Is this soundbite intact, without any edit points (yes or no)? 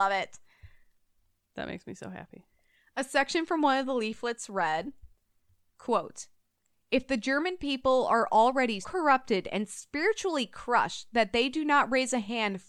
no